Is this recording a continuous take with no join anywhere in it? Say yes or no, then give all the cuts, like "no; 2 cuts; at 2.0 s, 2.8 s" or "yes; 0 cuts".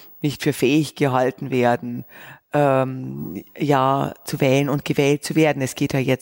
yes; 0 cuts